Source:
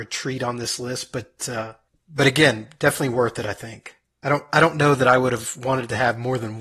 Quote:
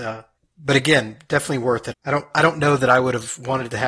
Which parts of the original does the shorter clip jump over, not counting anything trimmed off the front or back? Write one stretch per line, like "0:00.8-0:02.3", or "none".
0:03.4-0:04.1